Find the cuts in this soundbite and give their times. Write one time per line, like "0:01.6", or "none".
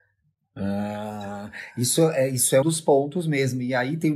0:02.6